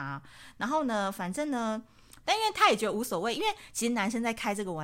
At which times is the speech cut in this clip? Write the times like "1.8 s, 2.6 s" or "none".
2.2 s